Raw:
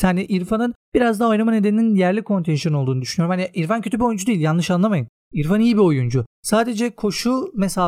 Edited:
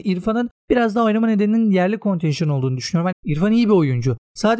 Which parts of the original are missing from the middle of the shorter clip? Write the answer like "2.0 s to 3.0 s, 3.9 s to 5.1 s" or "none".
3.4 s to 5.2 s